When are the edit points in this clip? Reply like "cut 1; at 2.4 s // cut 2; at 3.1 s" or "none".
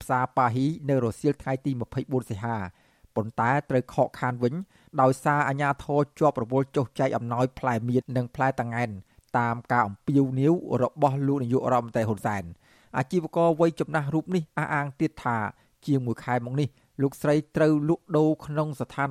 cut 1; at 8.0 s